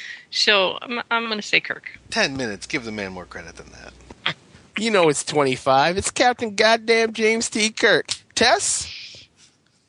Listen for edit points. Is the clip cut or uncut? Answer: uncut